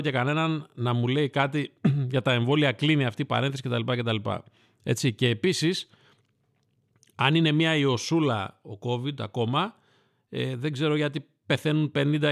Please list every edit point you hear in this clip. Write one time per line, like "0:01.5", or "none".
none